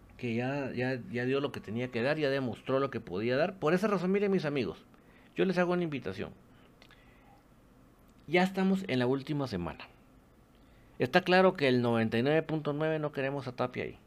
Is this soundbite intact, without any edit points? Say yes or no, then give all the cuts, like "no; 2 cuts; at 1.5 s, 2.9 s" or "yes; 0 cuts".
yes; 0 cuts